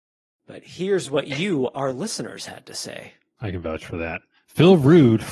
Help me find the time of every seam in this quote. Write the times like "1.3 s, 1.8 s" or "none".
3.4 s

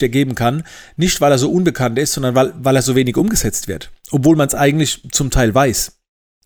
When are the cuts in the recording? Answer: none

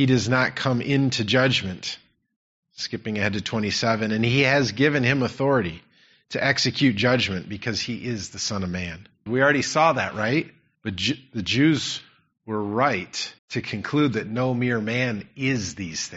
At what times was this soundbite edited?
9.3 s, 10.7 s, 13.4 s

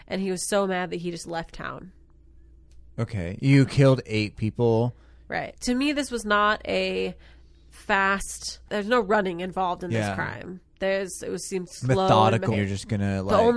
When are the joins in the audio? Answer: 5.5 s, 12.5 s

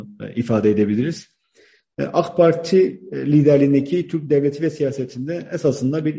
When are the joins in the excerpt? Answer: none

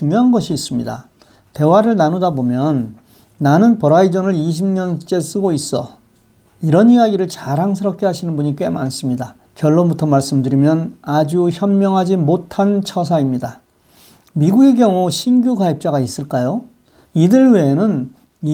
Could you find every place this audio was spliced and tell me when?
9.5 s, 17.1 s

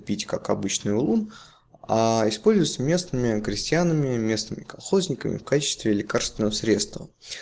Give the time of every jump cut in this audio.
none

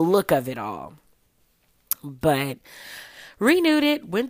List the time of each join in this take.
none

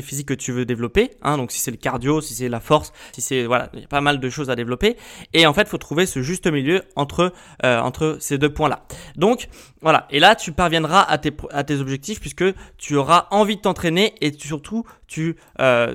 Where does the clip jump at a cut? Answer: 3.1 s

